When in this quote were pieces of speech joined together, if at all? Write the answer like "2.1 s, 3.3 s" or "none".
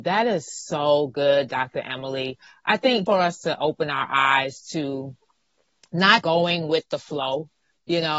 3.1 s, 6.2 s